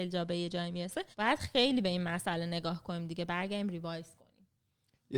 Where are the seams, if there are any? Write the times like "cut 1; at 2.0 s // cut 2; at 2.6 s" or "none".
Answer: cut 1; at 1.1 s